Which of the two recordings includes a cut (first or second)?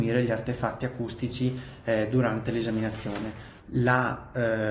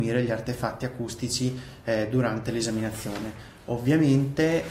first